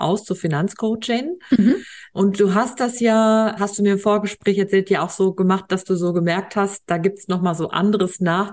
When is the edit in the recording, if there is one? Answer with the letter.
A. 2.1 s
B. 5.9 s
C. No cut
C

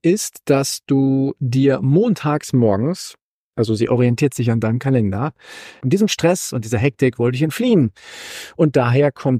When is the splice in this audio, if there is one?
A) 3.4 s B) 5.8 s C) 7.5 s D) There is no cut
B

